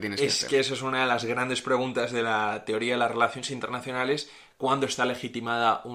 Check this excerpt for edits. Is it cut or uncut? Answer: uncut